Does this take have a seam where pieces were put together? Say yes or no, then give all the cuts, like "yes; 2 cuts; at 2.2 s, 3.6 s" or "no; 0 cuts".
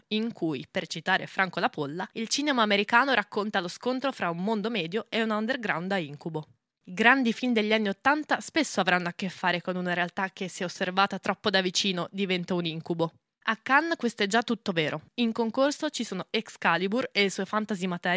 no; 0 cuts